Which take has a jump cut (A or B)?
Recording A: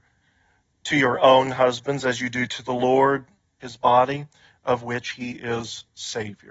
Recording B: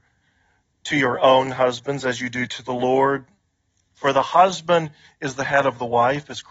A